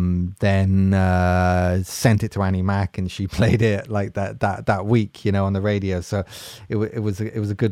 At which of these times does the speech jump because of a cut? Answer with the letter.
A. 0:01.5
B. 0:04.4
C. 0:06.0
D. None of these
D